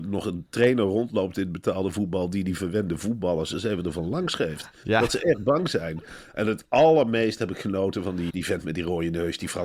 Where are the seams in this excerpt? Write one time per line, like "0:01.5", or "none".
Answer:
0:08.3